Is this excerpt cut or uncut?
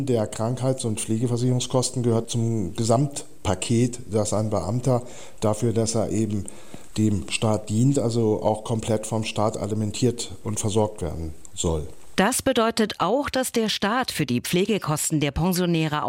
cut